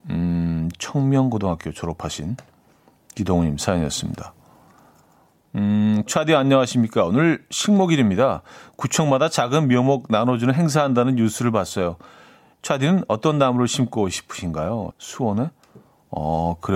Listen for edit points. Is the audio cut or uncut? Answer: cut